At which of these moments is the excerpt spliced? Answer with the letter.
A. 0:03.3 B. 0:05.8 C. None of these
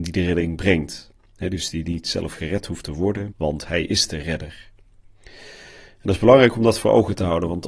A